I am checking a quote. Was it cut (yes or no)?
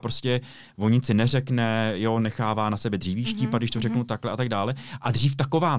no